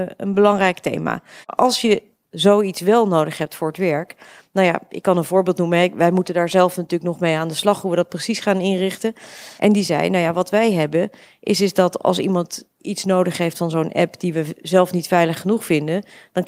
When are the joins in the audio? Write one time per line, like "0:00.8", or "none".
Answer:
0:01.4
0:09.6